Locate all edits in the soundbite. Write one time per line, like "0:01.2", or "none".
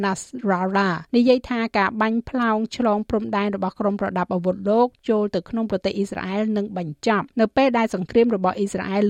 0:01.1
0:07.3